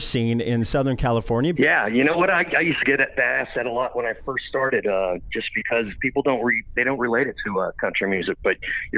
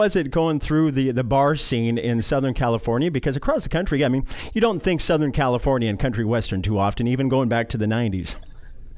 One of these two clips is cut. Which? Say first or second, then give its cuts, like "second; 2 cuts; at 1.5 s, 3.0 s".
first; 1 cut; at 1.6 s